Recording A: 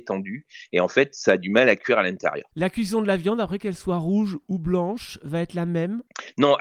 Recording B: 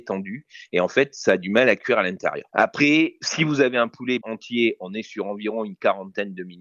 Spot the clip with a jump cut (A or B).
B